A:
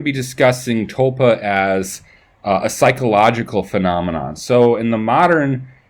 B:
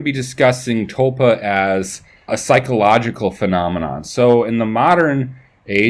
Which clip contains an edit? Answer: B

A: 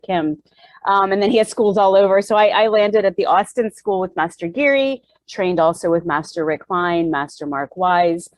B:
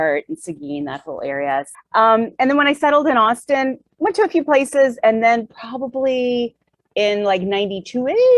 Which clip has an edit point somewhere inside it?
B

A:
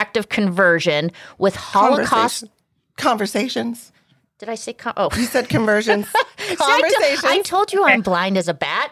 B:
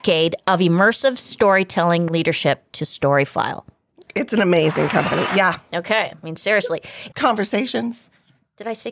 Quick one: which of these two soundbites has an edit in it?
B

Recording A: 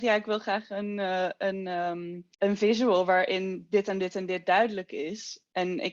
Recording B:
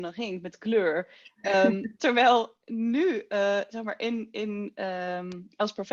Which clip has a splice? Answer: A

